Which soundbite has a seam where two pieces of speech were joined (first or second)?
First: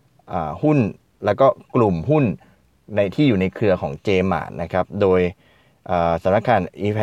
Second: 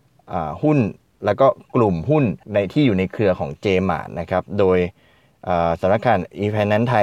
second